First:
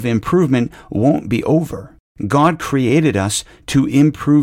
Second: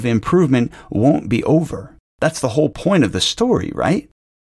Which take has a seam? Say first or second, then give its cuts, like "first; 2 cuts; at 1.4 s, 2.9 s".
first; 1 cut; at 2.1 s